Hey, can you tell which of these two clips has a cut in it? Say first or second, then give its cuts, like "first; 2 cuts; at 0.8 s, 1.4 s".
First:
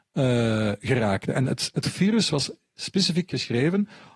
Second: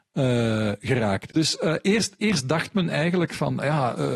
second; 1 cut; at 1.3 s